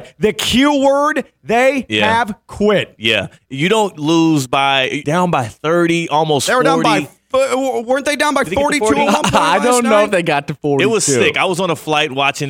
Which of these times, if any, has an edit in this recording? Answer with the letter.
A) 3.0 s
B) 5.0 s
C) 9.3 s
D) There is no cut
B